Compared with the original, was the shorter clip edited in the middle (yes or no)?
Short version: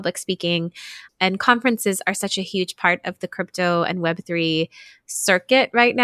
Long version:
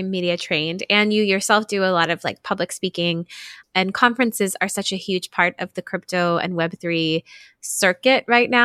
no